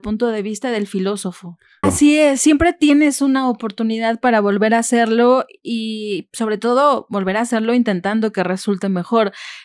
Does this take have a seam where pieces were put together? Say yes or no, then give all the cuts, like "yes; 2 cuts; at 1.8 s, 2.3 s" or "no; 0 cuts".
yes; 1 cut; at 1.8 s